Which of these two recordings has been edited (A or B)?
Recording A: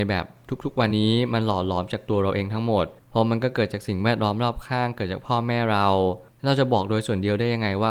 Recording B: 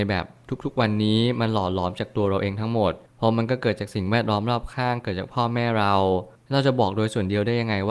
A